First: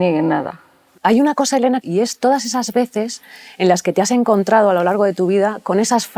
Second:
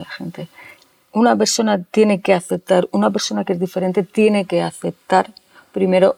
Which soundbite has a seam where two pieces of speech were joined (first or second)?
first